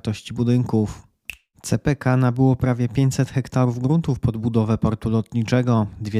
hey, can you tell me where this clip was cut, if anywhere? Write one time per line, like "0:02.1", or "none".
0:01.5